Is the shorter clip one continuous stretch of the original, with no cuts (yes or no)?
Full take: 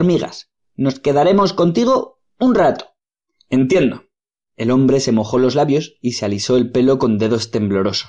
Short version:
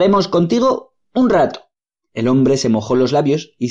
no